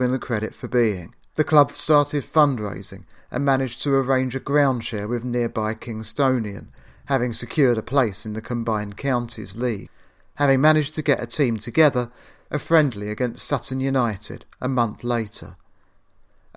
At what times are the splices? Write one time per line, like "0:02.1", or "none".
0:01.3
0:12.5